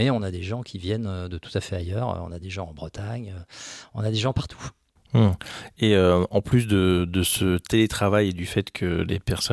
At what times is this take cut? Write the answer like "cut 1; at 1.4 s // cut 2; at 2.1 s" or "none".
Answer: none